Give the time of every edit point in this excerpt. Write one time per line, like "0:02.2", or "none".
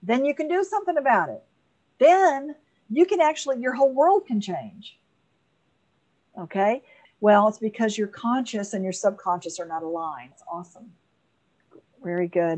0:07.0
0:10.3